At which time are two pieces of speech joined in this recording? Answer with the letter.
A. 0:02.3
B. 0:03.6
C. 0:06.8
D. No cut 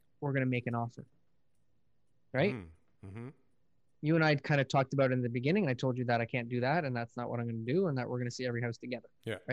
D